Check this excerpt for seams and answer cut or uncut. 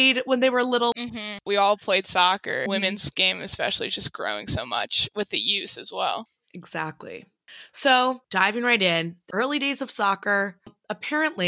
cut